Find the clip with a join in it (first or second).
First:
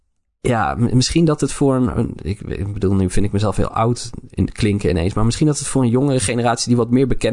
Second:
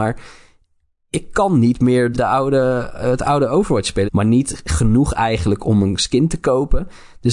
second